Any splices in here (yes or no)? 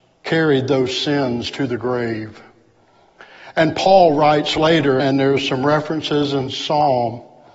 yes